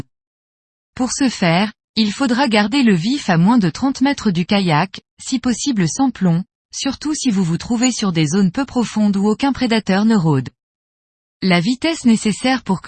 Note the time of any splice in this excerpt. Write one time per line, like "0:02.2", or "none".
none